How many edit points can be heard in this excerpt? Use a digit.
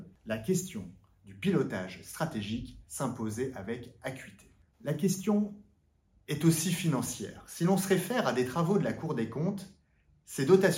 1